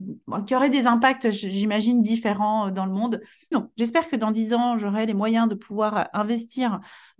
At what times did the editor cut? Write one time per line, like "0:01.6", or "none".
0:03.5